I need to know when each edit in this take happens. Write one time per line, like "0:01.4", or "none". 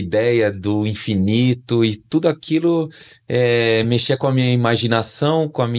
none